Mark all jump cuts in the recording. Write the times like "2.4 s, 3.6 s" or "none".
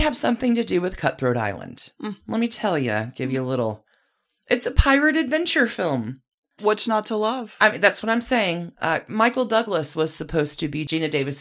6.6 s